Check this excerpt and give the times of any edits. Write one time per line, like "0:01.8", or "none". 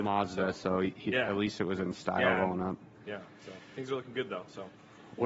none